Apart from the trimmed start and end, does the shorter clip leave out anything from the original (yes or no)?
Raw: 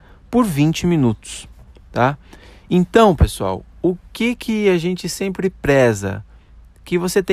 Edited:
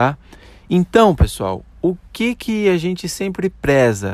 no